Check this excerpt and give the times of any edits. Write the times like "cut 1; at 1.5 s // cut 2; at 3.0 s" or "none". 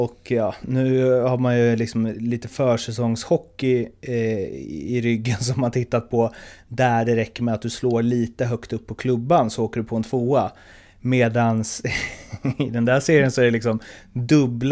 none

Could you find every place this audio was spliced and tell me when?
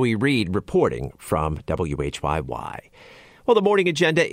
none

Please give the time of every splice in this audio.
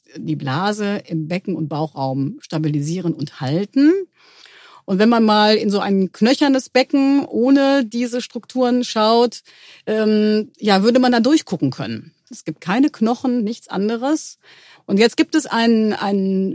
cut 1; at 12.3 s // cut 2; at 14.7 s

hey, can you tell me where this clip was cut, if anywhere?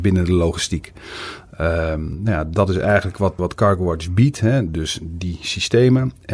cut 1; at 3.4 s

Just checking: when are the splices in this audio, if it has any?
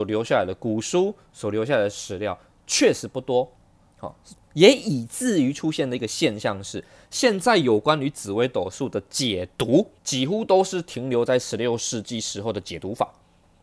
cut 1; at 4.3 s // cut 2; at 10.0 s

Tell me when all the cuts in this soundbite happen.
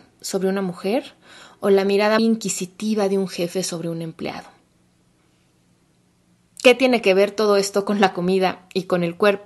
cut 1; at 2.2 s

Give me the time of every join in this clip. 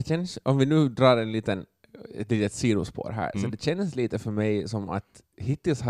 none

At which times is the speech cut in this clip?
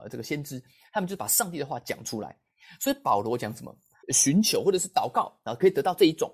cut 1; at 4.0 s

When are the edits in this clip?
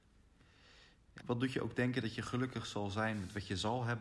cut 1; at 1.2 s

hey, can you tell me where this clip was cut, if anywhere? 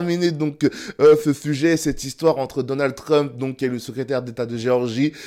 none

